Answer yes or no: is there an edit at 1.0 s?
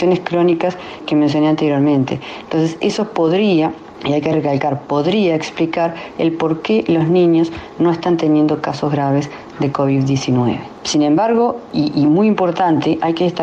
yes